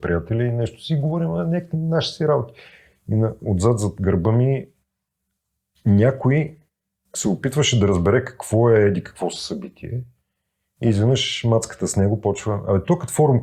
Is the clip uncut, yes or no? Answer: yes